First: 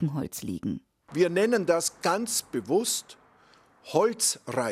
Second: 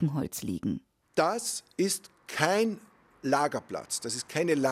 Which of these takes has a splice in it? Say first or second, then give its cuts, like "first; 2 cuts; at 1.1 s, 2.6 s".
first; 1 cut; at 1.1 s